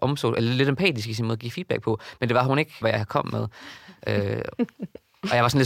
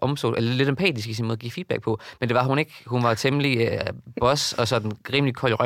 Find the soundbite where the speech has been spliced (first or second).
first